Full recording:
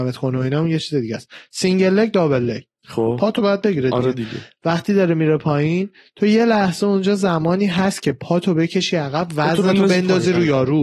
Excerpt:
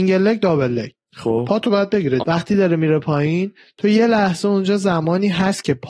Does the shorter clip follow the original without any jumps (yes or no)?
no